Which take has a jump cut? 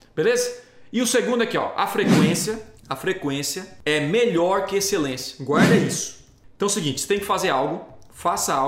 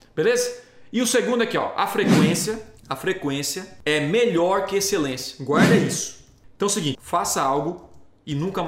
second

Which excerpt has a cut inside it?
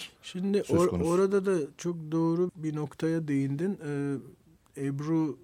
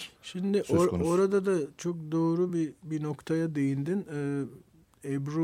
first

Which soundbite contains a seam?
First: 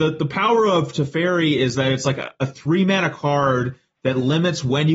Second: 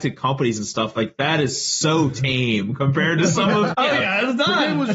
second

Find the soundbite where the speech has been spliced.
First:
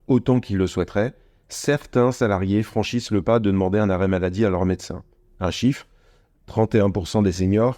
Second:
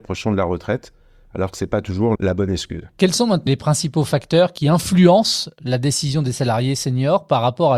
second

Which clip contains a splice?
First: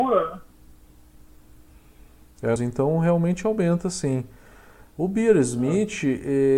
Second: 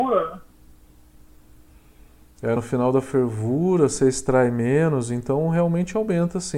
first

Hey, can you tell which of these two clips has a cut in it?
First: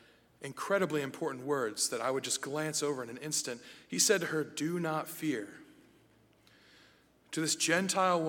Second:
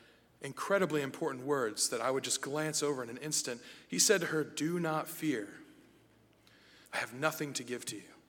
second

